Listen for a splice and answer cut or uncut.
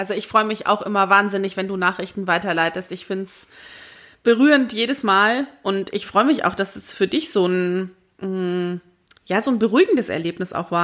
uncut